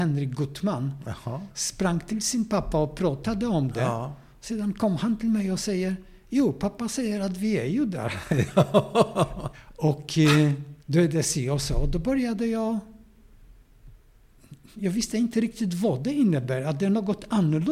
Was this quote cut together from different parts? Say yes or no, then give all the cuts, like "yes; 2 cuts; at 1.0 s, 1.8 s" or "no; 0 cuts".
yes; 2 cuts; at 9.5 s, 10.8 s